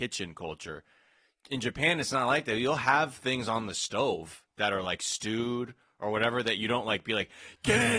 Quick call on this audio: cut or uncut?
uncut